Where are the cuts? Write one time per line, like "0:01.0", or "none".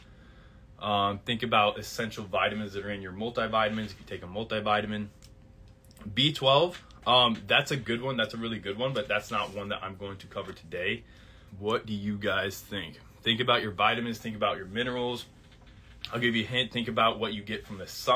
0:11.5

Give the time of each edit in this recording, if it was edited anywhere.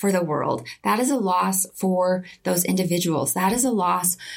none

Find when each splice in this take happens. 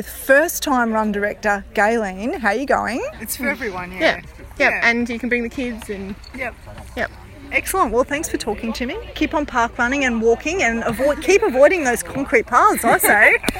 0:03.1
0:06.3

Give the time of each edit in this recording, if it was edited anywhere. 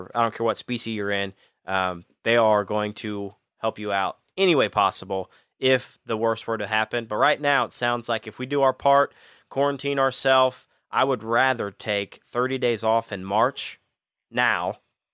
none

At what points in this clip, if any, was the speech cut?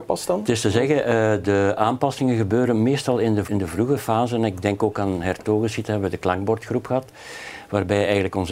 0:03.4

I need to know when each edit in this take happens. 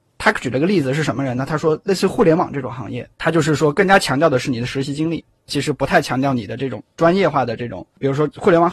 0:03.1

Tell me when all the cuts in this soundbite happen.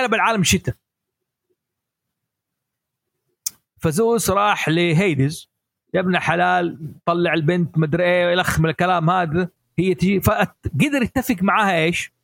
none

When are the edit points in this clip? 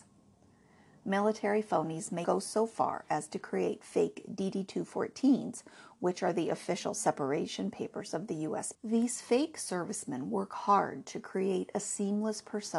0:02.2
0:08.7

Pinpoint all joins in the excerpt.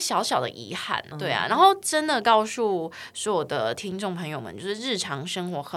0:01.1

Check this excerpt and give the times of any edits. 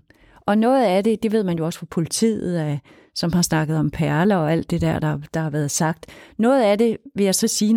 none

